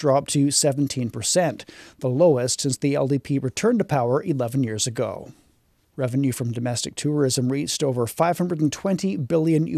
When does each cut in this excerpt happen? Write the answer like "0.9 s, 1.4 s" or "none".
5.9 s